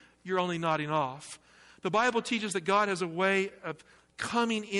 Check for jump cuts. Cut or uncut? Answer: uncut